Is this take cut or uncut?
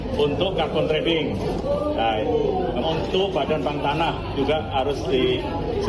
cut